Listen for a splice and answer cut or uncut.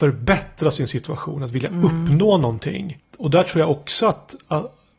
cut